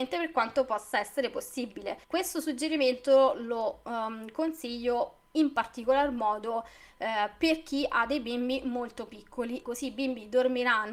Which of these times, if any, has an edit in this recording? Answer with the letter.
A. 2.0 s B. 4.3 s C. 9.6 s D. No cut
A